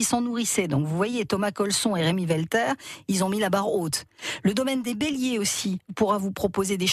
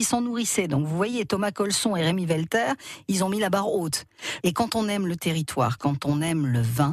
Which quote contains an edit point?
second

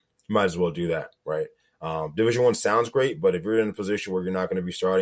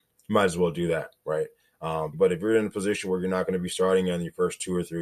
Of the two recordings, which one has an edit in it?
second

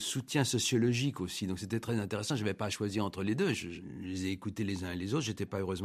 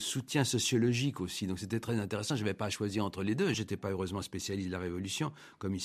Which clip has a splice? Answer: second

